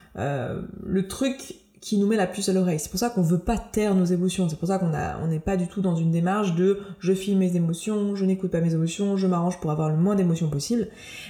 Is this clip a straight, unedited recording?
yes; 0 cuts

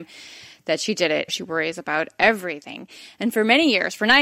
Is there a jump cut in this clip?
yes; 1 cut; at 1.3 s

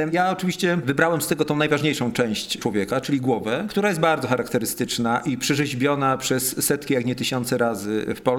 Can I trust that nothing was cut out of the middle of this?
yes; 0 cuts

